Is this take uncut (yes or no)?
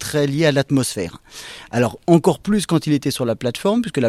yes